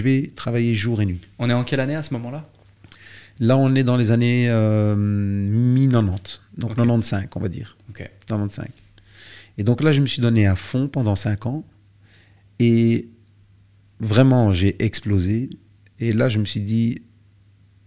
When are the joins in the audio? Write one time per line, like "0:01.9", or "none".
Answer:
none